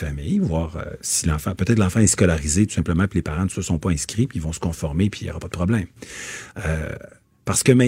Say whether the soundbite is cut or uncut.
uncut